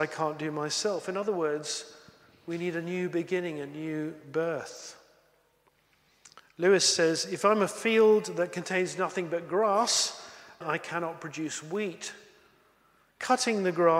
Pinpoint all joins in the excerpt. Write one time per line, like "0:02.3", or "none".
0:10.6